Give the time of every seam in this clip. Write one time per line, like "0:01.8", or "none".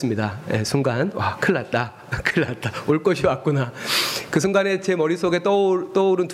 none